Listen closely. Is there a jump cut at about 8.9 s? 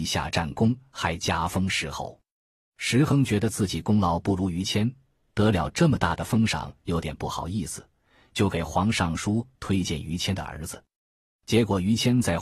yes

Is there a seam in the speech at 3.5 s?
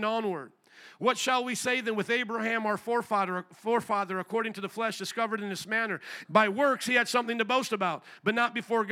no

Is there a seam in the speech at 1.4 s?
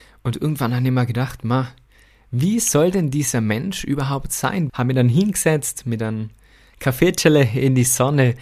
no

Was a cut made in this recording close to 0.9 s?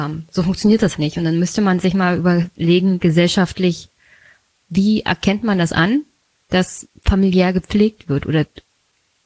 yes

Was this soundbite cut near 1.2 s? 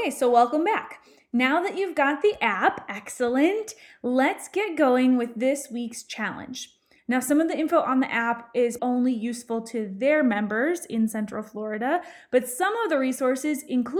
no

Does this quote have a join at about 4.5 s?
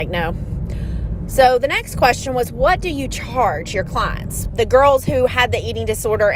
yes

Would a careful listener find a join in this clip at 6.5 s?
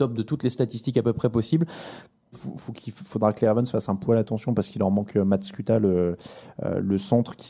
no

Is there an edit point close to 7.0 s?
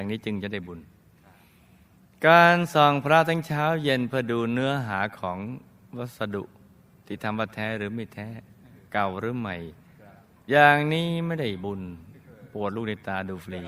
no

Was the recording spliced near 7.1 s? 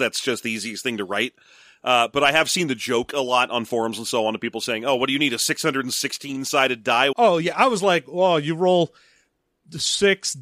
yes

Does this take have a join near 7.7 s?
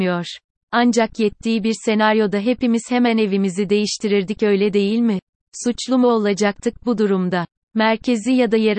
yes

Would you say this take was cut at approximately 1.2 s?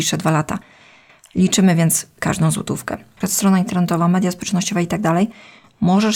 no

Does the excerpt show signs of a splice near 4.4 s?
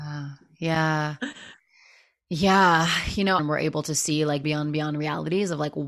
yes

